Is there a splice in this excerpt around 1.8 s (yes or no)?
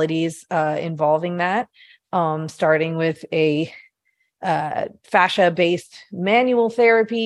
no